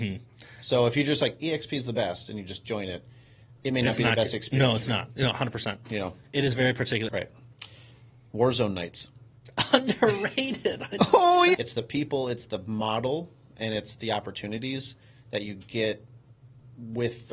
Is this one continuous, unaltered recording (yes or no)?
no